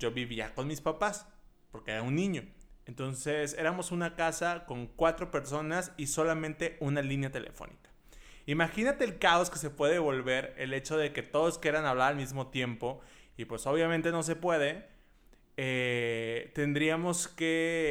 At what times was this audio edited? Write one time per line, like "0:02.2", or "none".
none